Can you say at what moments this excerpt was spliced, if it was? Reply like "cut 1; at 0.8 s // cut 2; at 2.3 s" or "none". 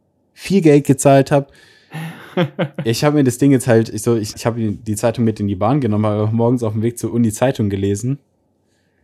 cut 1; at 4.3 s